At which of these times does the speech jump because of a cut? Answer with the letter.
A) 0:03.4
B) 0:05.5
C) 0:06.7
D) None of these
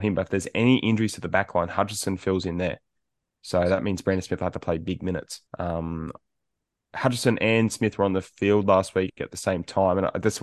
B